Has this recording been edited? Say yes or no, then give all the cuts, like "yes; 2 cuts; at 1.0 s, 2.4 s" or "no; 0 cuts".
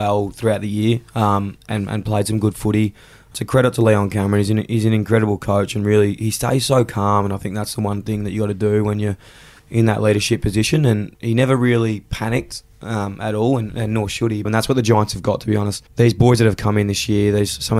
yes; 2 cuts; at 14.4 s, 15.9 s